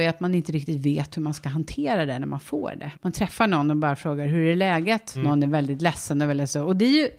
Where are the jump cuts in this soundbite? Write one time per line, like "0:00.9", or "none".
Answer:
0:02.9
0:05.1